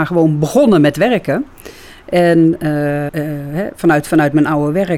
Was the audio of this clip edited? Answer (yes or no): yes